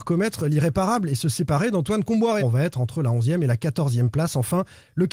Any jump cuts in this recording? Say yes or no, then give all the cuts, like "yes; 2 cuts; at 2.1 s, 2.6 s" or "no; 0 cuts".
yes; 1 cut; at 2.4 s